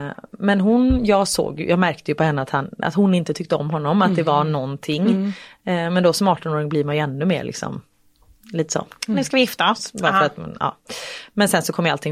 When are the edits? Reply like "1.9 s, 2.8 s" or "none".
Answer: none